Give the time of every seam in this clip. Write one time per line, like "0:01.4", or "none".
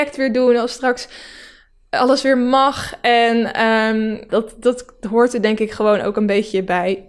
0:04.3